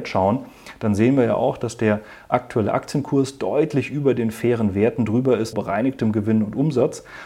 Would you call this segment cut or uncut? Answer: cut